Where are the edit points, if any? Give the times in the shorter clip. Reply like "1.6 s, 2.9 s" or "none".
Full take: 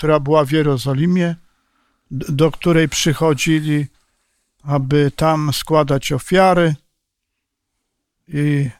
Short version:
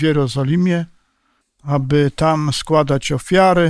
1.4 s